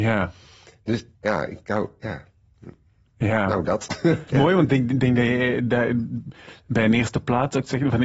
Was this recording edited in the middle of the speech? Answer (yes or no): yes